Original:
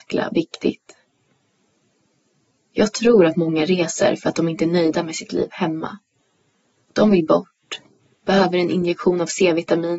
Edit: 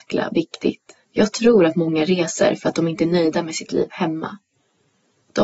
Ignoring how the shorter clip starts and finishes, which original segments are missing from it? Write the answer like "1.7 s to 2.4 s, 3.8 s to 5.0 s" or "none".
1.0 s to 2.6 s